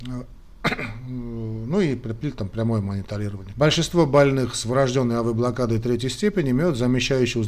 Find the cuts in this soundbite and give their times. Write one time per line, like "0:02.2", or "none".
0:03.5